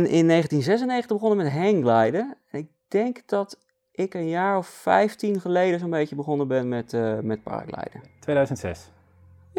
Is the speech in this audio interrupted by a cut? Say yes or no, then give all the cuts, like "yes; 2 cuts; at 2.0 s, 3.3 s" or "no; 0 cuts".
no; 0 cuts